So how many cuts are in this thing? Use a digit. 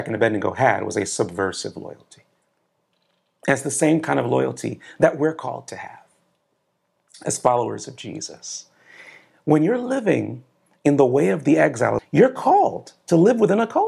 1